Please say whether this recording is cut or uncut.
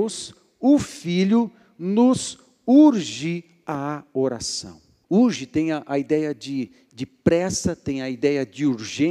cut